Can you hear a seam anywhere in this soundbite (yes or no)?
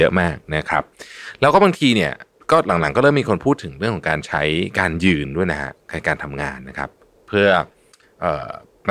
no